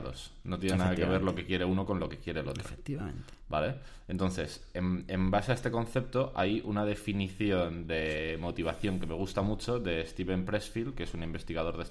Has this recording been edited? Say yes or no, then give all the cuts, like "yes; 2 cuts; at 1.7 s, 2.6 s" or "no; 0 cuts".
no; 0 cuts